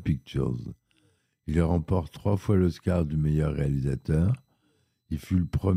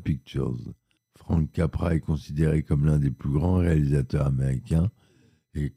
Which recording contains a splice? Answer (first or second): second